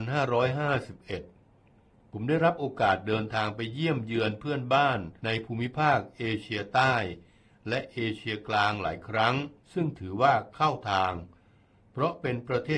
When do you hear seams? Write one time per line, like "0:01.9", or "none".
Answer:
0:05.2
0:09.6